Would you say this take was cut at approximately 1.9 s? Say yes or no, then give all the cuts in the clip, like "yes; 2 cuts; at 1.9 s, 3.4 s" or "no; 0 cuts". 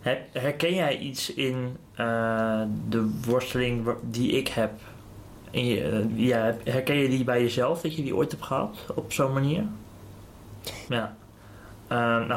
no; 2 cuts; at 6.1 s, 10.9 s